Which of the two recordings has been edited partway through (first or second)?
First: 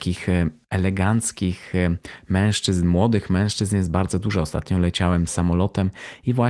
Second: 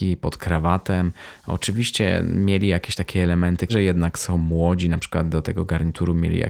second